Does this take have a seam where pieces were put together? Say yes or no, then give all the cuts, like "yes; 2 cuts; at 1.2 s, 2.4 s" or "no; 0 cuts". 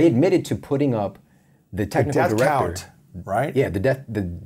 no; 0 cuts